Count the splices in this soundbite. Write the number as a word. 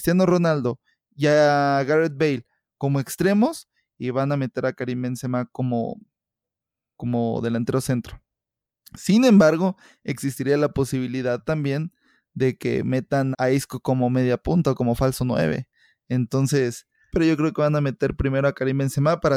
two